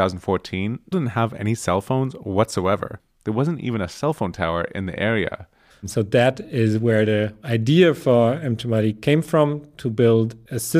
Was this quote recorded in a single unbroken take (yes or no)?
no